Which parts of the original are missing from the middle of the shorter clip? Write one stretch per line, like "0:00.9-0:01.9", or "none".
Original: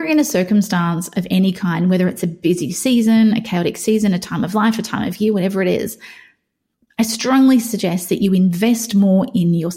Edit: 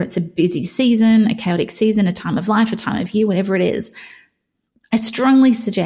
none